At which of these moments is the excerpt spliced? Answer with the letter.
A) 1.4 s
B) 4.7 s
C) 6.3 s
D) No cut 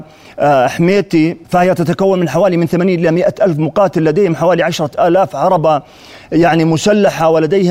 A